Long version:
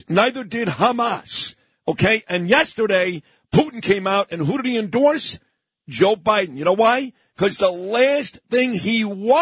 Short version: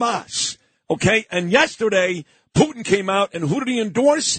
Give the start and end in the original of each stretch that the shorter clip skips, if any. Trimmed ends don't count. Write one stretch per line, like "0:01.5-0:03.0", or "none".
none